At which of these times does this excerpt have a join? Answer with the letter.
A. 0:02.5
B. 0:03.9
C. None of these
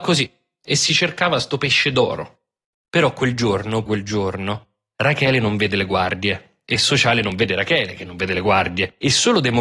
B